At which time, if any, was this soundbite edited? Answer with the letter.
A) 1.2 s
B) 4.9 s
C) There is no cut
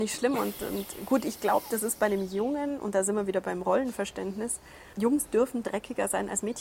C